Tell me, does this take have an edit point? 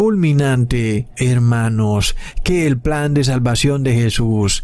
yes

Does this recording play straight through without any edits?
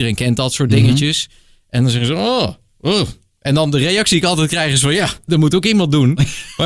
no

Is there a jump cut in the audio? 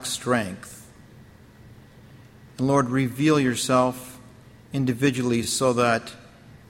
no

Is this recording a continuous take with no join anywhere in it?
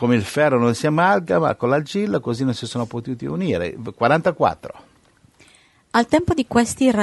yes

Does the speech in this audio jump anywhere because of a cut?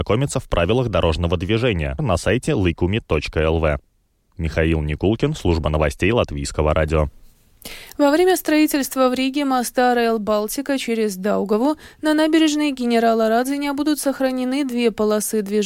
yes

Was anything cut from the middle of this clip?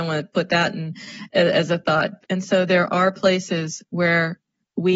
yes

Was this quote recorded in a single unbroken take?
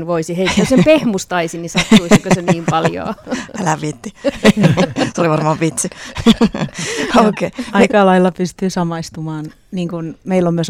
yes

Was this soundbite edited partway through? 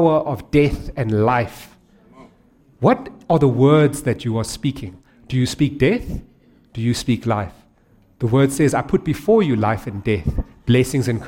no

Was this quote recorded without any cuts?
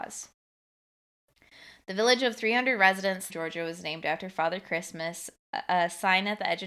no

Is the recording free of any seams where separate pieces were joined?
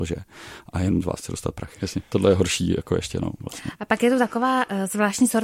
no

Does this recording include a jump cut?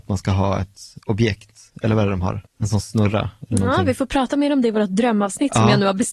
yes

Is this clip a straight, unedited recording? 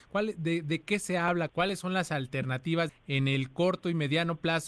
no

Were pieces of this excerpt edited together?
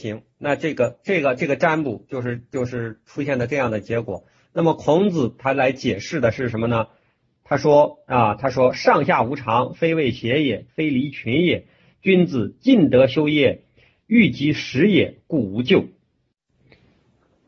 yes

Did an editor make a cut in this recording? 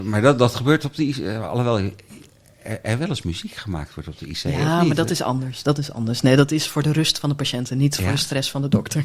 no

